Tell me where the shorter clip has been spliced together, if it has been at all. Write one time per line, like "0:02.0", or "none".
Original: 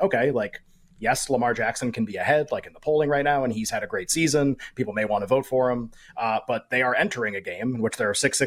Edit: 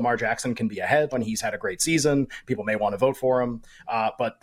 0:01.1